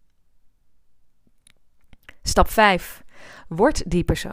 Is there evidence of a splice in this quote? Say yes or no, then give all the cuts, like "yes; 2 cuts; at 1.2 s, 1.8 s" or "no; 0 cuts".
no; 0 cuts